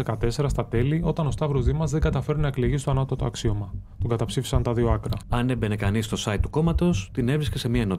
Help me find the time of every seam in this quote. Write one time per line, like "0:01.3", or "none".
0:05.2

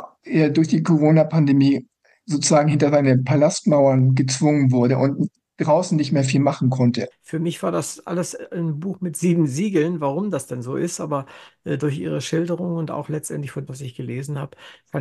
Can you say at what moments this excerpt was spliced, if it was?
0:07.1
0:13.7

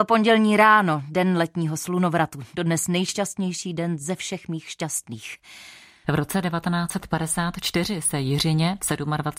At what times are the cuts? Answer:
0:06.0

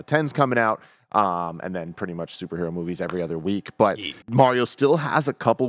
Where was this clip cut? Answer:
0:04.2

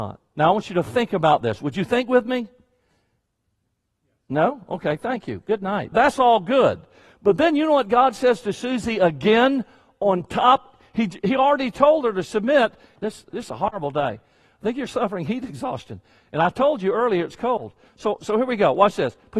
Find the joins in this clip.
0:05.9
0:13.0

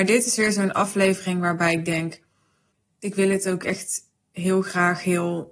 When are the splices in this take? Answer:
0:03.0

